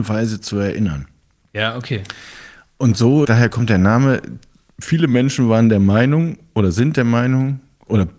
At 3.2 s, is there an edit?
yes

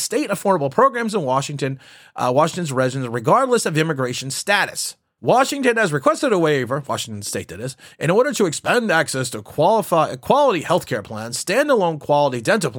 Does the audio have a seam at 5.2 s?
yes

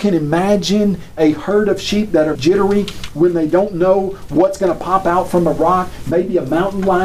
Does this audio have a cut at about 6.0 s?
no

